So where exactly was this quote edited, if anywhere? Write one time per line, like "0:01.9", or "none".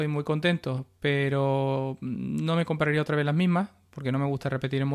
none

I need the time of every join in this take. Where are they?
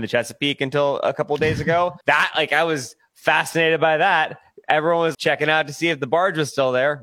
0:02.0
0:05.1

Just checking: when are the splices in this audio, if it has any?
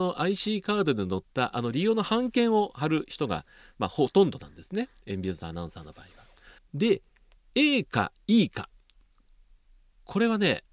0:06.6

